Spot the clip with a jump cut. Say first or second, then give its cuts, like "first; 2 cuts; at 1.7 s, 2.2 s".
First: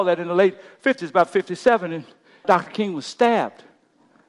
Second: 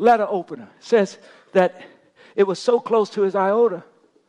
first; 1 cut; at 2.4 s